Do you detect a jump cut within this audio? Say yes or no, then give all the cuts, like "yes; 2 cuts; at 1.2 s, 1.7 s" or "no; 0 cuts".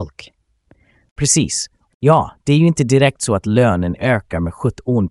yes; 1 cut; at 1.9 s